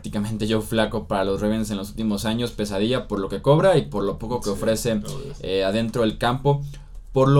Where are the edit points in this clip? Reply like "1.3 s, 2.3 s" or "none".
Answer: none

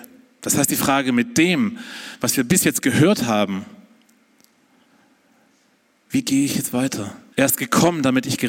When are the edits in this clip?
7.3 s

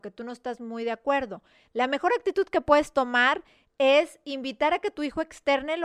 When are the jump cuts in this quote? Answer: none

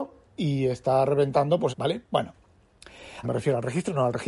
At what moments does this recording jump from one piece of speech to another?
1.7 s, 3.2 s

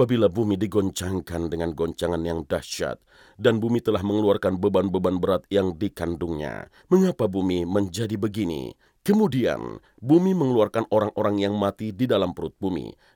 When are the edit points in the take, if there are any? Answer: 6.8 s, 8.9 s

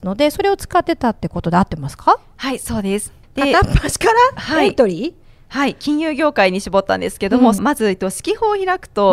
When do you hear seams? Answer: 3.2 s, 7.6 s

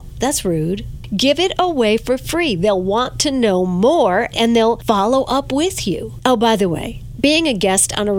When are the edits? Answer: none

